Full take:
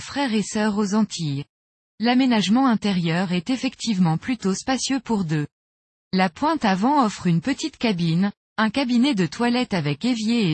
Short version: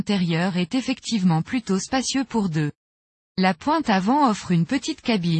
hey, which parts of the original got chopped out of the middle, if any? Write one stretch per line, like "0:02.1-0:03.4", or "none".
none